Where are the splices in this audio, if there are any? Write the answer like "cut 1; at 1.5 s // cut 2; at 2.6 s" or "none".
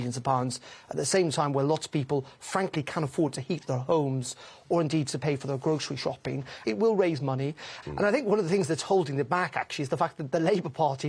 cut 1; at 6.6 s // cut 2; at 7.8 s